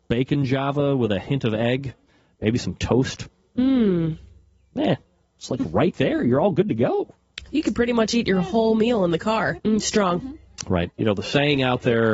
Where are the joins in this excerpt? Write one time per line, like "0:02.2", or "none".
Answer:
0:09.6
0:10.9